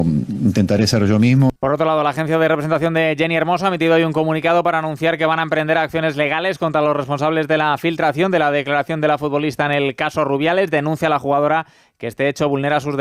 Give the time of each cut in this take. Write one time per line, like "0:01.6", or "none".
0:01.6